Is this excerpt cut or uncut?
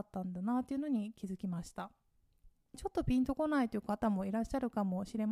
cut